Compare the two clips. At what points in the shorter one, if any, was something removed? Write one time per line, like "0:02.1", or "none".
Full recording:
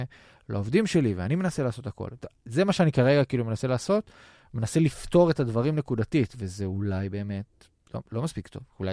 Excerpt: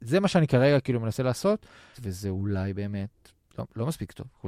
0:01.9